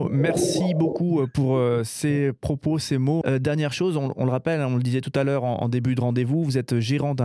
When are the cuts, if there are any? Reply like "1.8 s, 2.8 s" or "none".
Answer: 3.2 s